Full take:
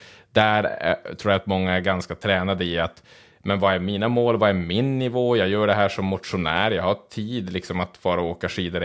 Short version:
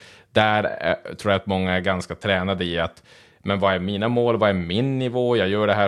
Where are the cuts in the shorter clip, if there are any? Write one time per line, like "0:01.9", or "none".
none